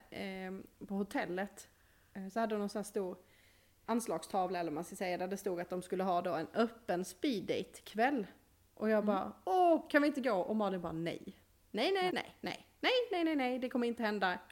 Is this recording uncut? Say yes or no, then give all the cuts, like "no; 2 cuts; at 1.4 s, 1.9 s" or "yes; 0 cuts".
no; 2 cuts; at 3.9 s, 12.1 s